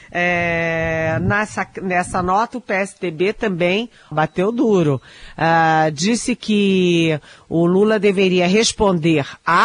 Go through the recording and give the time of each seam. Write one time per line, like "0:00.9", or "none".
0:04.1